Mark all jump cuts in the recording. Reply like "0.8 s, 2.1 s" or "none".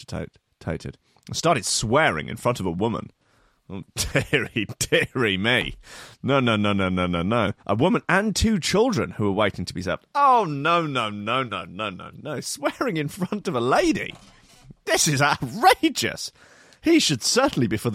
7.6 s

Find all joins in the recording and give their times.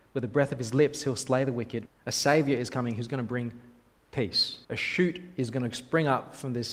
1.9 s, 4.6 s

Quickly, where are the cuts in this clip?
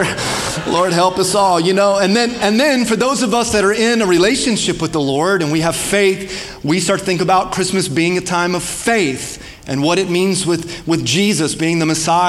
none

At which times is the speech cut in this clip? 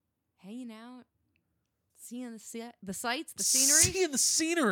none

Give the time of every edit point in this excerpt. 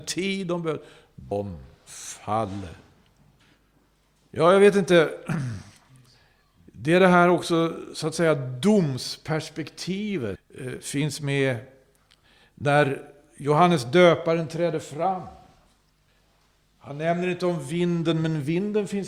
none

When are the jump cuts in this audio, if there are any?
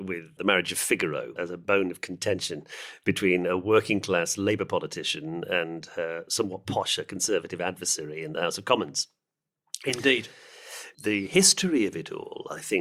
1.4 s

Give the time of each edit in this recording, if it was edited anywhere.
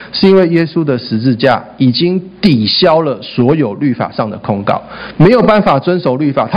5.1 s

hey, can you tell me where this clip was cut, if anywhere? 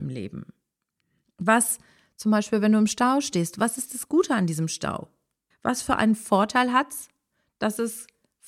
5.5 s

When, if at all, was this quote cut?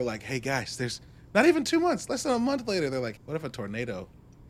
3.2 s

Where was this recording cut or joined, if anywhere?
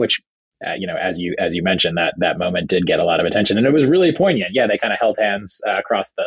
none

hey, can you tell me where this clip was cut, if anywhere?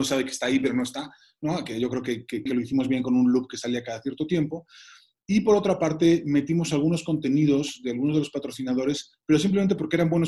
2.5 s

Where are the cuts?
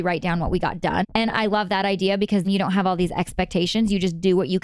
1.0 s, 2.4 s

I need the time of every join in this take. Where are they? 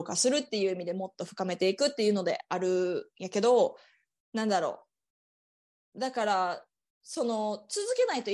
none

